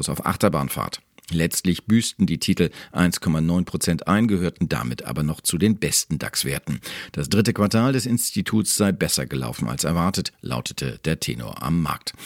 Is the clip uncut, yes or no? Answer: yes